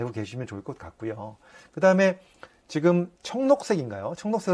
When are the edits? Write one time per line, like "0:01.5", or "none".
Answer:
0:03.2

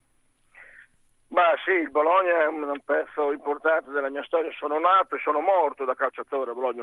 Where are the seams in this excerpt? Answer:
none

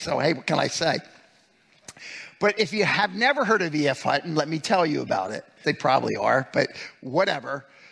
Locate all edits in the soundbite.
0:05.6

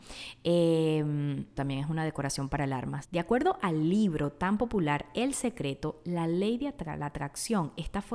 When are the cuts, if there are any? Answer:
0:01.6
0:03.0

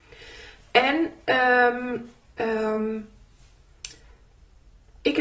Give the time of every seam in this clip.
none

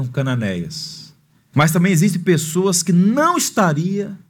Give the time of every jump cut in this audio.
0:01.5

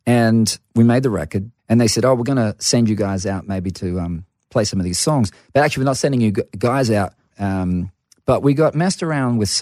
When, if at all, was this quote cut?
0:01.6
0:07.3

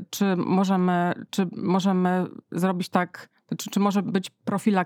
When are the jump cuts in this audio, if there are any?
0:01.3

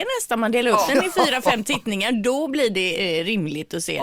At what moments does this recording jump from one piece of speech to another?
none

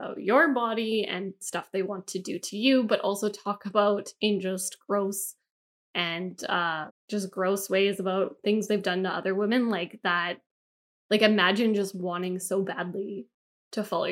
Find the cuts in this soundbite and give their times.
0:06.9

